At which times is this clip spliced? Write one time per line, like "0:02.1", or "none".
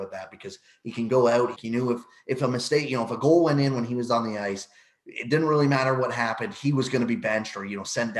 0:01.6